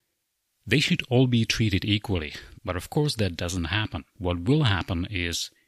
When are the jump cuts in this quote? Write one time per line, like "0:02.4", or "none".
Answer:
0:02.5
0:04.1